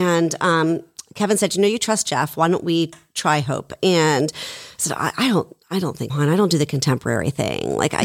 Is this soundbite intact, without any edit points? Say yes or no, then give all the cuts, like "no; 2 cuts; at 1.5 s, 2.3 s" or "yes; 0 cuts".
no; 1 cut; at 6.1 s